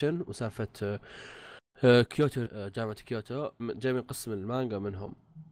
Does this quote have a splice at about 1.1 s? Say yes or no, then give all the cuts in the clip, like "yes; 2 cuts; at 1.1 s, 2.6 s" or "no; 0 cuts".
no; 2 cuts; at 2.5 s, 3.6 s